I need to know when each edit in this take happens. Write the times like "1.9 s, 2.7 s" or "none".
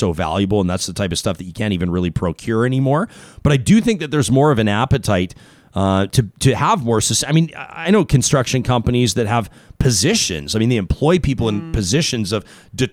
none